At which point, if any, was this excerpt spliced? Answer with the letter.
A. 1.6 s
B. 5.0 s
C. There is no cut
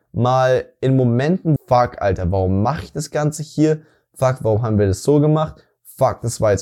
A